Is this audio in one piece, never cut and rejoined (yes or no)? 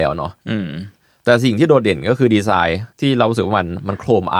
no